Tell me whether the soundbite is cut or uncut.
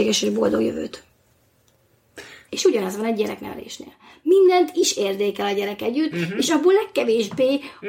cut